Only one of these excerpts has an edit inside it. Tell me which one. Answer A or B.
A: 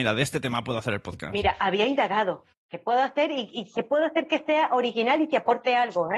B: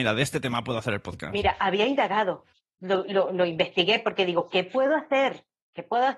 A